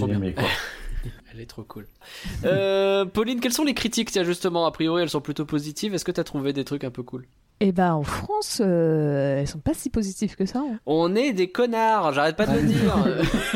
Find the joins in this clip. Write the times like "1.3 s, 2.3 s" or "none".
2.4 s